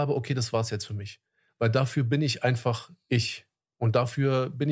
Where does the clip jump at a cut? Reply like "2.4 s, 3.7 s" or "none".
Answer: none